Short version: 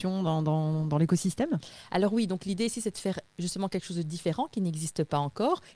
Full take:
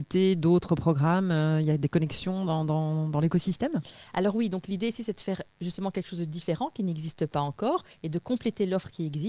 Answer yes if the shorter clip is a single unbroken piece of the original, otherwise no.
yes